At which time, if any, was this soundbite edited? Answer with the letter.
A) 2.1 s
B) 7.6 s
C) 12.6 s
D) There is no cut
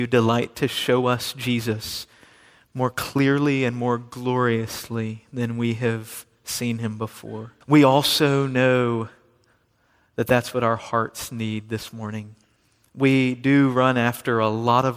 B